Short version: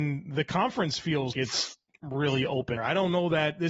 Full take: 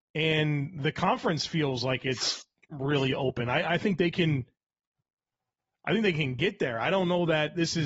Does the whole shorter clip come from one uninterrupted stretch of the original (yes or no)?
no